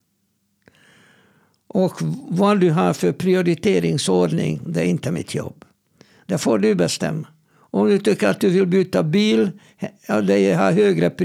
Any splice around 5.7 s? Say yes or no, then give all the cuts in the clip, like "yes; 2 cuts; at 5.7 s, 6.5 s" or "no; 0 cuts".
no; 0 cuts